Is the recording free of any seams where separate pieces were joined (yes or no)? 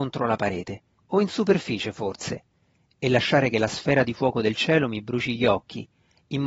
no